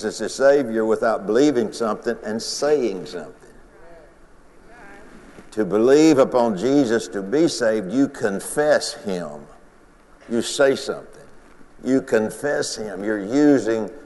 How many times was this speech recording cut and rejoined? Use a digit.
1